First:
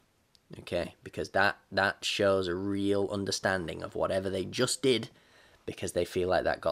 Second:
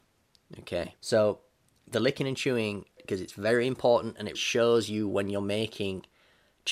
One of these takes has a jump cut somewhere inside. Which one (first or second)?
second